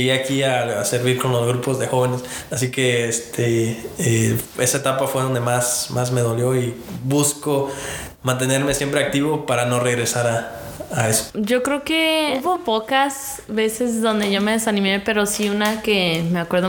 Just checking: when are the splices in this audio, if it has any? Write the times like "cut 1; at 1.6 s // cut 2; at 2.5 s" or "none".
cut 1; at 11.3 s // cut 2; at 12.6 s